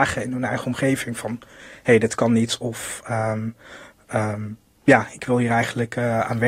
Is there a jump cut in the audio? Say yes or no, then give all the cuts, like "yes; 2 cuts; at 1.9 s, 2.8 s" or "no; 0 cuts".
no; 0 cuts